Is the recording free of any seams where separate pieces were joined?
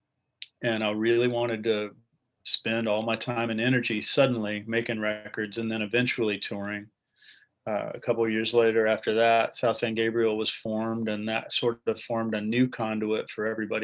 yes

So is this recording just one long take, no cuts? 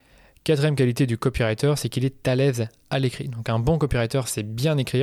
yes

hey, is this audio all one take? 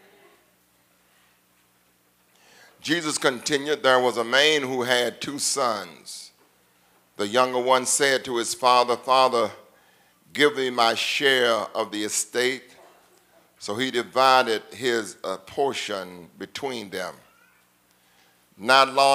yes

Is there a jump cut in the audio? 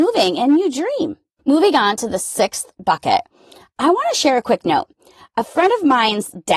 yes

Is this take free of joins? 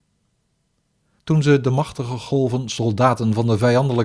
no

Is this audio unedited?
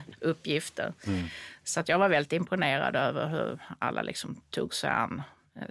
yes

